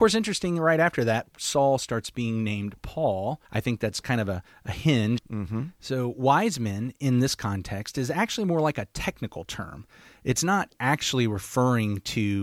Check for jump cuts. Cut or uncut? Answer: cut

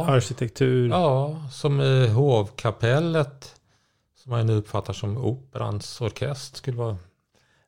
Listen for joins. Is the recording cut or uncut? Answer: cut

